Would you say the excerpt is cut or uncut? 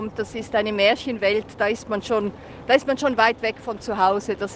uncut